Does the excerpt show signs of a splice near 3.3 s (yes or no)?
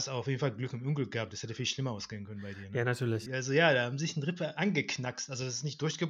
yes